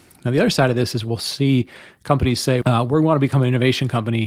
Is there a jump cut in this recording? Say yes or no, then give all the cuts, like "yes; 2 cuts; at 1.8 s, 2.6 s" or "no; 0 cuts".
yes; 1 cut; at 2.6 s